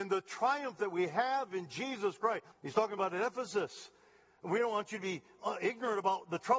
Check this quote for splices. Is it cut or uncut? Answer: cut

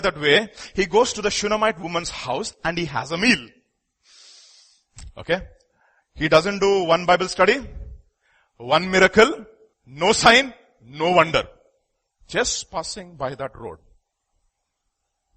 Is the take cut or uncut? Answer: cut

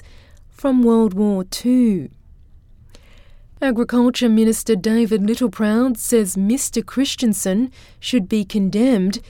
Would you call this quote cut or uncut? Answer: uncut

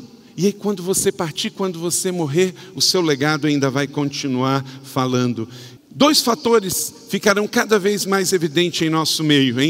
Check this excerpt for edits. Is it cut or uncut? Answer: cut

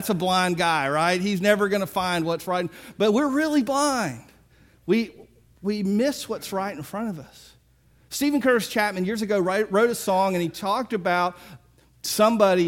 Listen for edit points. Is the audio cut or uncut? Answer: uncut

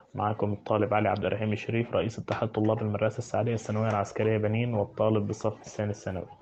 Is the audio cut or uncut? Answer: uncut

